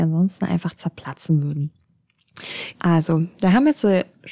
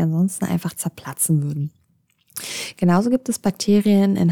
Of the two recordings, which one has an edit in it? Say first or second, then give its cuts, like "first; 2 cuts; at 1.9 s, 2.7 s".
first; 1 cut; at 2.7 s